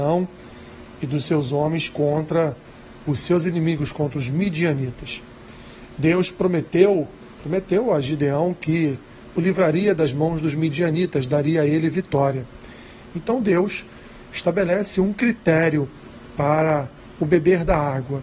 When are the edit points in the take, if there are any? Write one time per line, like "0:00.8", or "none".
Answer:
0:13.1